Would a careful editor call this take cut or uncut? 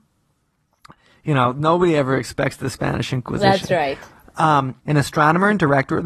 cut